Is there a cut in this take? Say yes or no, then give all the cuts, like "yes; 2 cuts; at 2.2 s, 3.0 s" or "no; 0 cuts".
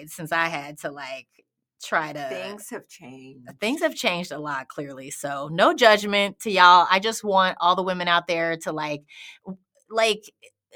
no; 0 cuts